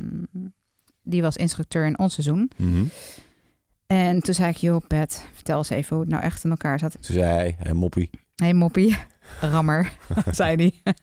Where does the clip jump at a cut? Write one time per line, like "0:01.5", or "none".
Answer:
0:06.9

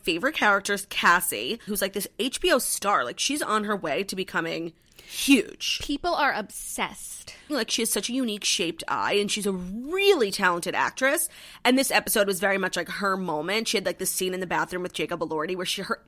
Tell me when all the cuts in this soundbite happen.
0:01.7
0:07.5

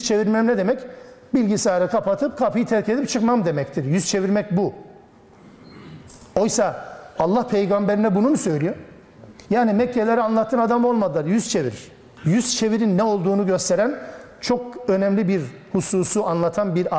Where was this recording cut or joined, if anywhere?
0:12.2

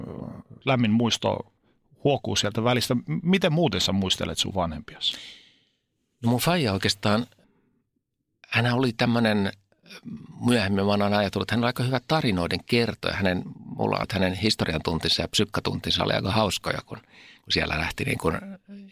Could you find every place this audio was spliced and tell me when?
0:14.0

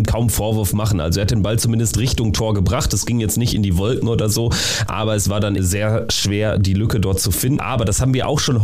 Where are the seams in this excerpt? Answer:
0:05.6
0:07.6

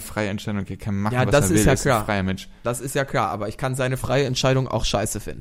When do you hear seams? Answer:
none

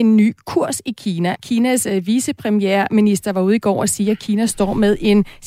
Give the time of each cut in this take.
0:01.3

